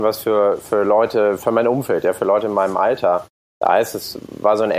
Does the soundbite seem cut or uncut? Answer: cut